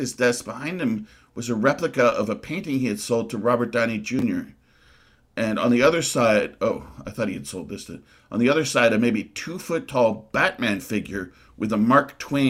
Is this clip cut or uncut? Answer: uncut